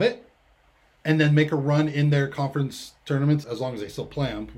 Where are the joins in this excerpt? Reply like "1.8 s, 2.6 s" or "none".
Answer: 3.4 s